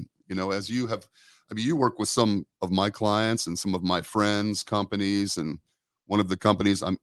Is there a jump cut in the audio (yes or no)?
no